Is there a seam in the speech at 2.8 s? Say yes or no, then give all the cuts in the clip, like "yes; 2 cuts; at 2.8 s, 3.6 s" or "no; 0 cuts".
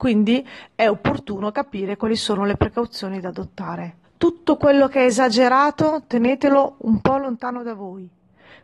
no; 1 cut; at 4.0 s